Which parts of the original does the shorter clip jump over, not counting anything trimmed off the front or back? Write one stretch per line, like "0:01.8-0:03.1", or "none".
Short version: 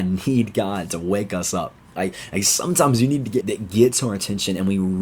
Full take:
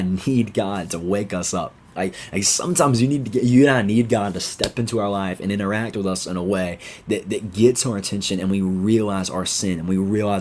0:03.4-0:07.2